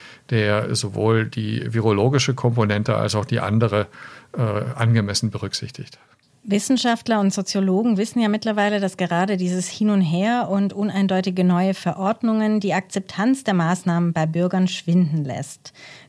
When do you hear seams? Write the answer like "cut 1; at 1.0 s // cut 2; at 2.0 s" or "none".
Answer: none